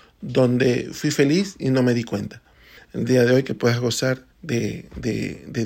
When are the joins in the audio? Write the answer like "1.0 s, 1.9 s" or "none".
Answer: 2.8 s, 4.3 s